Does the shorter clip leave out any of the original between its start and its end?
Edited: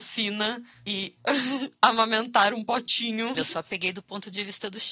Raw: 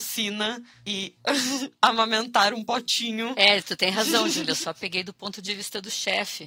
yes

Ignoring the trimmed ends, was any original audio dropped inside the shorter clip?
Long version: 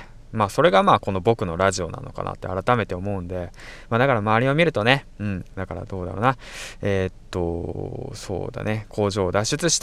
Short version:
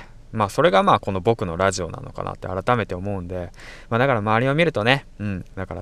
no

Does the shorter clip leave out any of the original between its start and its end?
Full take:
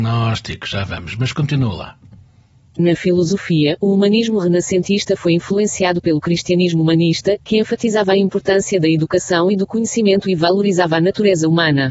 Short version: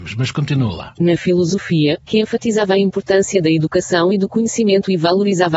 yes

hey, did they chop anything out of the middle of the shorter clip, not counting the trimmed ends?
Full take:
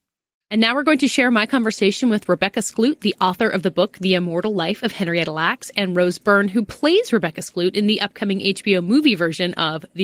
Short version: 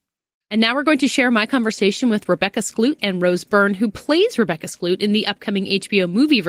yes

